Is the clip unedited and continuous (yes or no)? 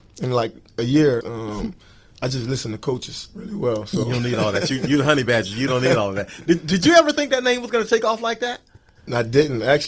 no